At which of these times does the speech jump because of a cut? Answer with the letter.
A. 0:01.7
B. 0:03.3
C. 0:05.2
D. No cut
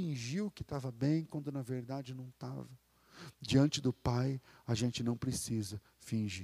B